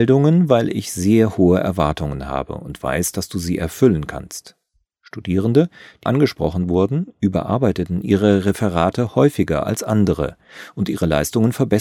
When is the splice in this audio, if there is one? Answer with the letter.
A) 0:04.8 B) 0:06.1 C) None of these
B